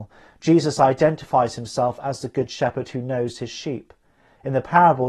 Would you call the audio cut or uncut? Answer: uncut